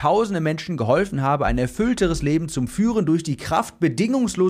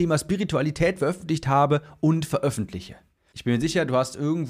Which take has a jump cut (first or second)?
second